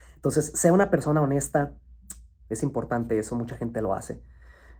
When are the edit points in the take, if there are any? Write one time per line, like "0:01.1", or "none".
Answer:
0:02.4